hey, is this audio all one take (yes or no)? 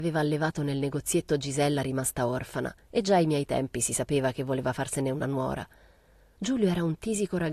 yes